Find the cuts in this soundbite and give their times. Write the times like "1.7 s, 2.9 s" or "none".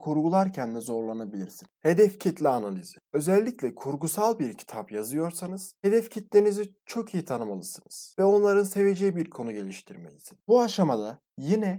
1.8 s, 10.4 s